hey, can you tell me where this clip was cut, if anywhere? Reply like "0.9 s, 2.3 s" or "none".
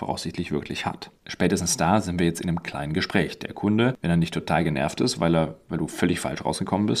none